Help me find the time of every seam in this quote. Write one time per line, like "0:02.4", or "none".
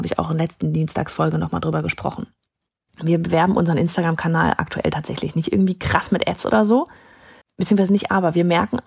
0:02.9
0:07.4